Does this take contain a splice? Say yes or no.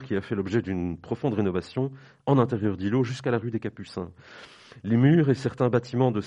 no